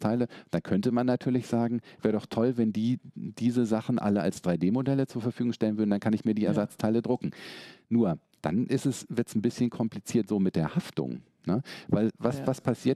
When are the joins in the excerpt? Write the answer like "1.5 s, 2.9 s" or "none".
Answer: none